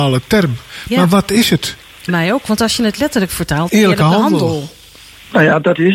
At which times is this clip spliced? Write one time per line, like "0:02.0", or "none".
0:02.1
0:03.7

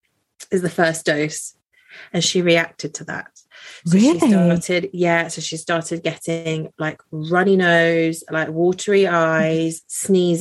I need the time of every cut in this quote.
none

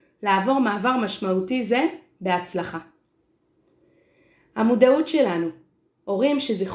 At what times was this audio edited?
none

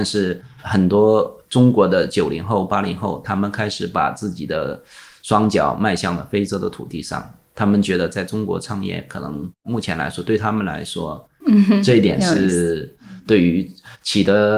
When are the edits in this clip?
0:11.4

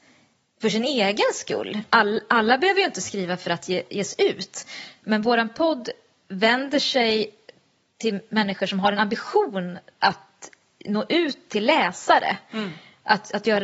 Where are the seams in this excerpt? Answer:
none

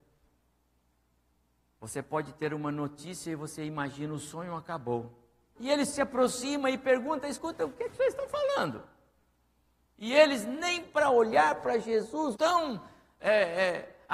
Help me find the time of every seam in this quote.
0:05.5
0:12.3

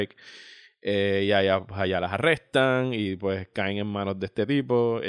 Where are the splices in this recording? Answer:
none

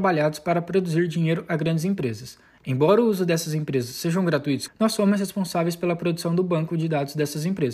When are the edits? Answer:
0:04.7

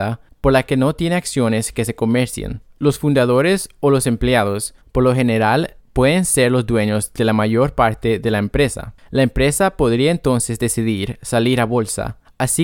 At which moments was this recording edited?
none

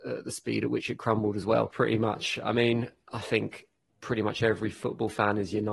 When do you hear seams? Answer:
0:01.7

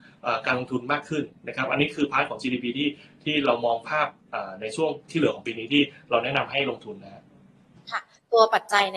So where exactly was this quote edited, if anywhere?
none

